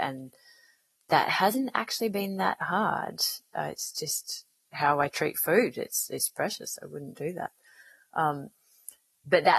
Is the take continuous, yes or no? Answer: yes